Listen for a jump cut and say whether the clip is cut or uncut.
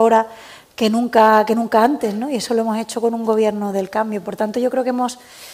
uncut